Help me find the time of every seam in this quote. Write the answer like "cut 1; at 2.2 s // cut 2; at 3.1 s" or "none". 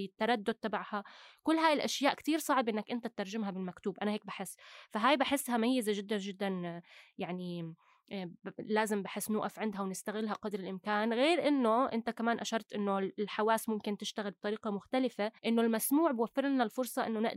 cut 1; at 15.4 s